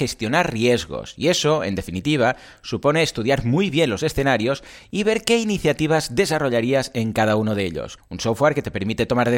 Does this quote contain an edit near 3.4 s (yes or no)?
no